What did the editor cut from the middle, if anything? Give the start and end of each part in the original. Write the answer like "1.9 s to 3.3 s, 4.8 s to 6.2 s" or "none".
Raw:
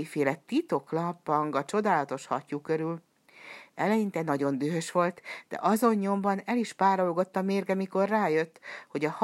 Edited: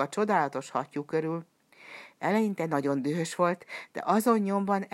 none